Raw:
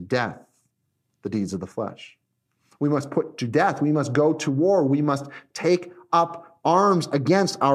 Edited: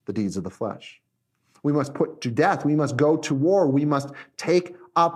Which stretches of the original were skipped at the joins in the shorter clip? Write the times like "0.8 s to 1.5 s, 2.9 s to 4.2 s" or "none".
none